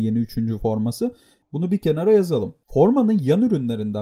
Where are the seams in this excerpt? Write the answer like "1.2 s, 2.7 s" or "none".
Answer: 1.4 s